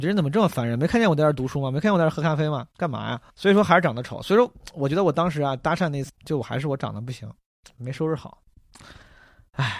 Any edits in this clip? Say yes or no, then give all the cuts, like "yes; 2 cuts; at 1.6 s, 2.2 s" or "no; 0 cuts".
yes; 2 cuts; at 3.3 s, 6.1 s